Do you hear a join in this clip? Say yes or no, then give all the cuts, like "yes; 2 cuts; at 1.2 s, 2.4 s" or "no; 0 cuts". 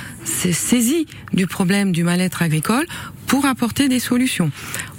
no; 0 cuts